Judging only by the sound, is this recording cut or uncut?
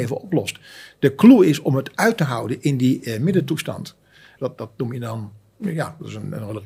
cut